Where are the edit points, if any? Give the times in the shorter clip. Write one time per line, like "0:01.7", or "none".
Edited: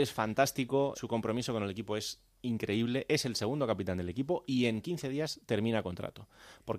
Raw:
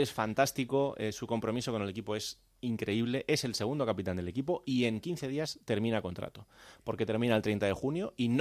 0:00.9